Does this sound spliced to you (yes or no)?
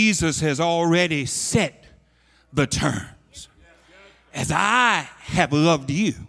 no